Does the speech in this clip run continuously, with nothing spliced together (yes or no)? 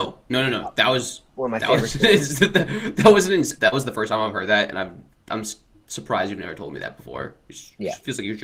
no